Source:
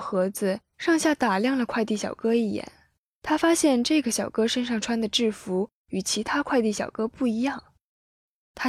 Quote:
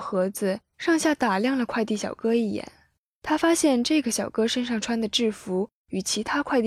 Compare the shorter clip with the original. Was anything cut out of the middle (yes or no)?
no